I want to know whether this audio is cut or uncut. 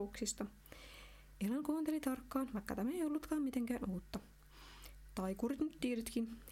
uncut